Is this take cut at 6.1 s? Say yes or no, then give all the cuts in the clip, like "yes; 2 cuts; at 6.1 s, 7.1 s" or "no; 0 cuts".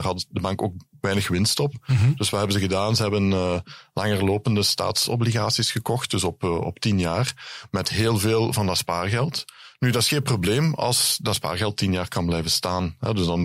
no; 0 cuts